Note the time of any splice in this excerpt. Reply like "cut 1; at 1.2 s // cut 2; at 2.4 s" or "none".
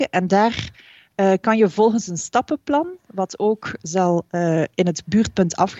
none

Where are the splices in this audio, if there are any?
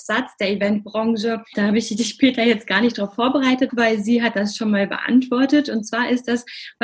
cut 1; at 1.5 s // cut 2; at 3.7 s

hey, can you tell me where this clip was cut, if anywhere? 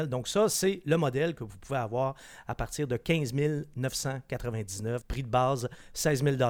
cut 1; at 5.0 s

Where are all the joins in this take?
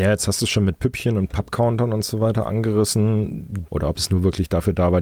cut 1; at 3.7 s

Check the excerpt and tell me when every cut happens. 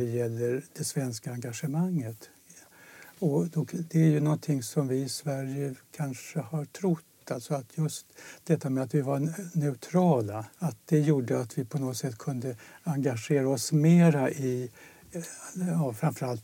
cut 1; at 10.5 s

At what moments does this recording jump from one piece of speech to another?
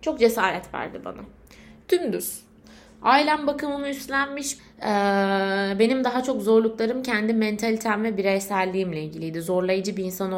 cut 1; at 1.8 s // cut 2; at 4.6 s

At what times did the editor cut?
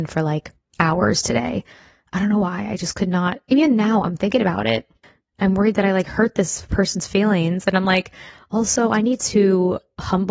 none

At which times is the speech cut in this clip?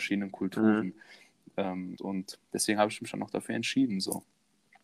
cut 1; at 2.0 s

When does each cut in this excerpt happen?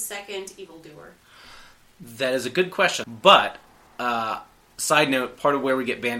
cut 1; at 3.0 s

